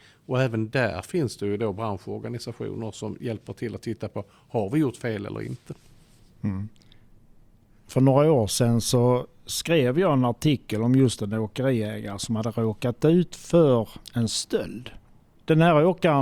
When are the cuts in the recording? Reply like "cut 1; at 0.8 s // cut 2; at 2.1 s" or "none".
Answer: none